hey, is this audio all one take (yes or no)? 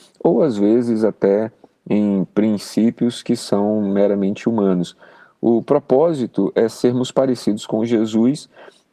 yes